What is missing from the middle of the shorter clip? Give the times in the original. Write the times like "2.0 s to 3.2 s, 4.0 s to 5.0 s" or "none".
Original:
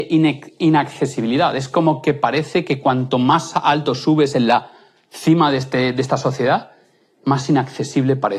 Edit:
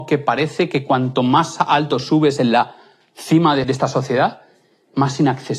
5.6 s to 5.9 s